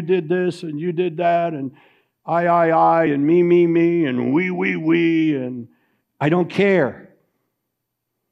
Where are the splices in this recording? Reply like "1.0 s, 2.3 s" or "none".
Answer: none